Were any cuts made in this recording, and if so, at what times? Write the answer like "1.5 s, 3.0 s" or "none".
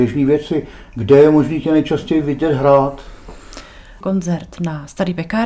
4.0 s